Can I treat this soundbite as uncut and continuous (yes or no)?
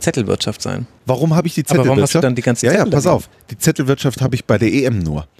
no